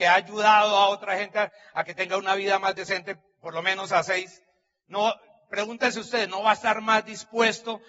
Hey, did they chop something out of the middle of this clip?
no; 0 cuts

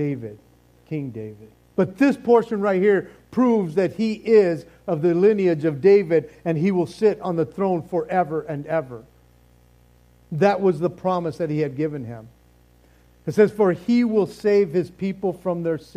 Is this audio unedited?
no; 1 cut; at 1.7 s

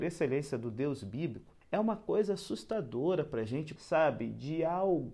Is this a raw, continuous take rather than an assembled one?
no; 2 cuts; at 1.6 s, 3.8 s

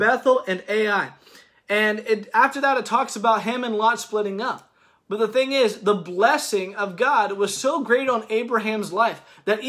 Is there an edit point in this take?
no; 0 cuts

